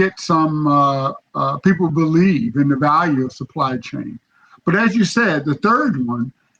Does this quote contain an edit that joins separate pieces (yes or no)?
yes